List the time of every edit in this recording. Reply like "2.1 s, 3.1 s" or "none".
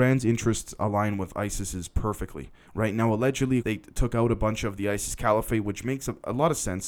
3.6 s